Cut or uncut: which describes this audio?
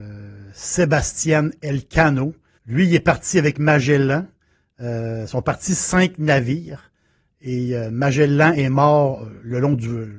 cut